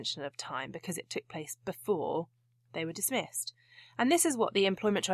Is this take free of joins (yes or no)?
yes